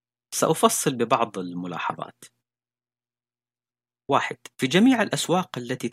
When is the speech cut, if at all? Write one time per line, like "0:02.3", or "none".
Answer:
0:04.5